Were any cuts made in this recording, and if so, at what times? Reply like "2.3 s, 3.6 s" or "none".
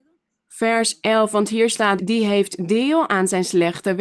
2.0 s